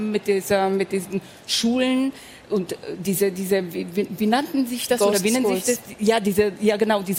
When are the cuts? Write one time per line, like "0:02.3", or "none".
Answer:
none